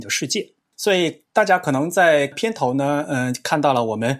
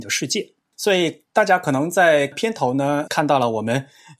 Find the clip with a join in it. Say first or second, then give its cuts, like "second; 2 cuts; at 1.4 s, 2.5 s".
second; 1 cut; at 3.1 s